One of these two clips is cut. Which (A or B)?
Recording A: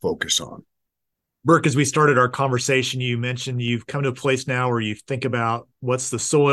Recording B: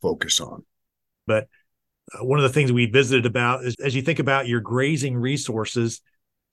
B